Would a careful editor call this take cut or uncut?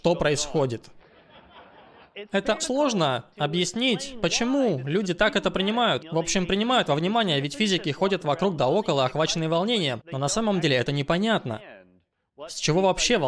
cut